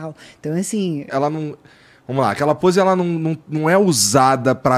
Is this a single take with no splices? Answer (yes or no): no